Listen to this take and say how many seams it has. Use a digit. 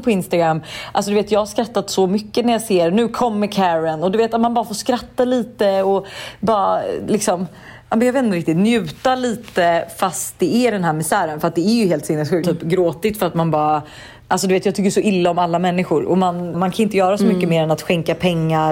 2